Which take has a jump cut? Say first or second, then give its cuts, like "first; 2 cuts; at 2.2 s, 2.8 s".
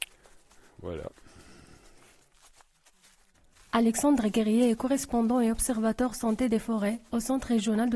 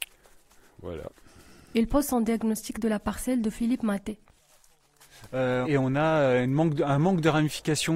second; 2 cuts; at 1.7 s, 5.6 s